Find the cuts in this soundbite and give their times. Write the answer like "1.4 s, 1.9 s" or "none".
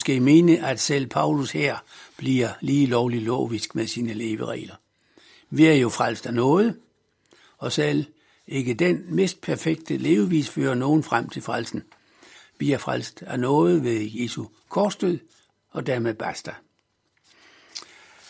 none